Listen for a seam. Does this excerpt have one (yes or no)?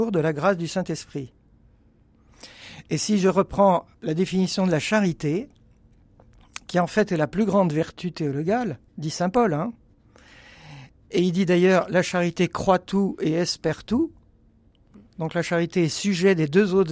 yes